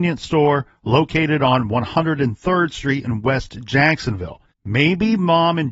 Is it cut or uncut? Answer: cut